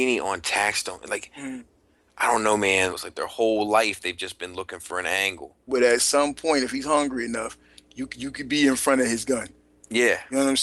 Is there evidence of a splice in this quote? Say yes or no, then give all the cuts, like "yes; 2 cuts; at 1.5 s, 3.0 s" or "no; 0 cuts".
yes; 2 cuts; at 2.9 s, 5.7 s